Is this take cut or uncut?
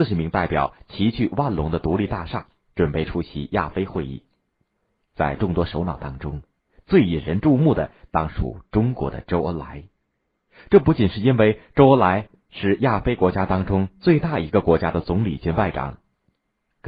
uncut